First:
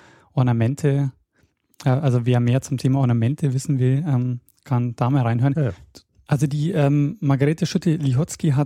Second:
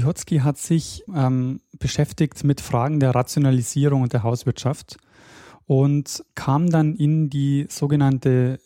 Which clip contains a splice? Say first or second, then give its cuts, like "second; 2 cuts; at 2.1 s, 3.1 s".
second; 1 cut; at 1.1 s